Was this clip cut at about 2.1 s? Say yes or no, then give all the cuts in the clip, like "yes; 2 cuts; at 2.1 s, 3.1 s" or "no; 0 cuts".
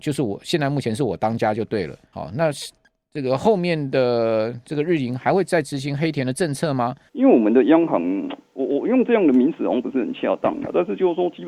yes; 2 cuts; at 2.1 s, 7.1 s